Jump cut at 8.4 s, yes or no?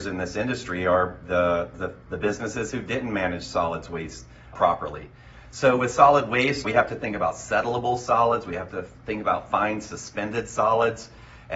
no